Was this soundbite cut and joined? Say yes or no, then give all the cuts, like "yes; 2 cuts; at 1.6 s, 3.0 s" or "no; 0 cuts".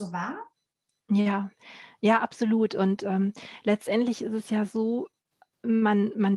no; 0 cuts